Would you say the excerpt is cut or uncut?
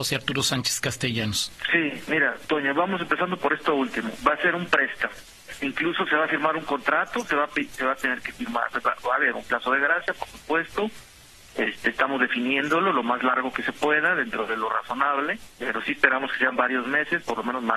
cut